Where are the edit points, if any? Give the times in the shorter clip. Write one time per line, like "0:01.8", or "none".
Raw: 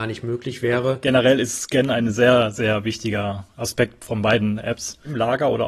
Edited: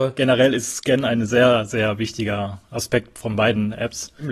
none